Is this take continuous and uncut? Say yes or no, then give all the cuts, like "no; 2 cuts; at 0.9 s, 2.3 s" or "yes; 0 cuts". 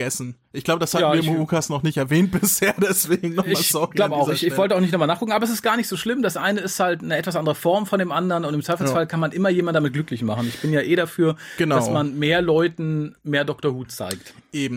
yes; 0 cuts